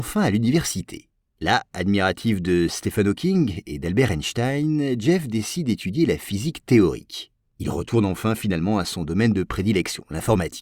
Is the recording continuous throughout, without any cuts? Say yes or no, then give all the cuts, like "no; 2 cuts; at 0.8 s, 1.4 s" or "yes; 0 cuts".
no; 2 cuts; at 1.3 s, 7.4 s